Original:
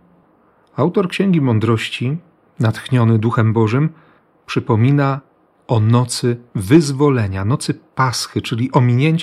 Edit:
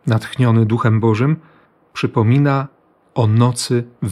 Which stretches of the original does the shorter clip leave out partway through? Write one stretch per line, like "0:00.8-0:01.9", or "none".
none